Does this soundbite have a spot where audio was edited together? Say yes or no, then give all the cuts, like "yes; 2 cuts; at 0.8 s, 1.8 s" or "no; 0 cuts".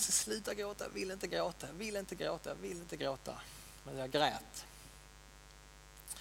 no; 0 cuts